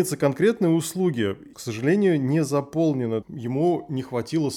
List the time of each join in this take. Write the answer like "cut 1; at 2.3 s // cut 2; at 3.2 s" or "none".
cut 1; at 1.5 s // cut 2; at 3.2 s